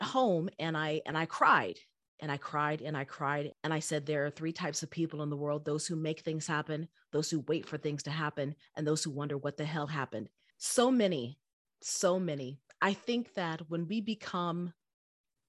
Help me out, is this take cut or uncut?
cut